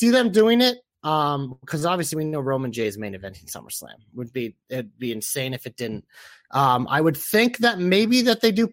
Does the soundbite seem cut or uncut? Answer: uncut